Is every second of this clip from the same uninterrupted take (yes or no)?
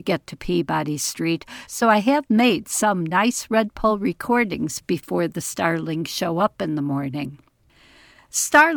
yes